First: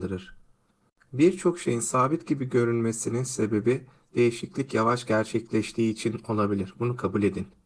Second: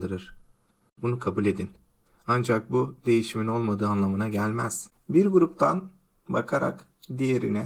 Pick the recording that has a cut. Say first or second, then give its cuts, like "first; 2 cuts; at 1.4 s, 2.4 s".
second; 2 cuts; at 1.0 s, 4.9 s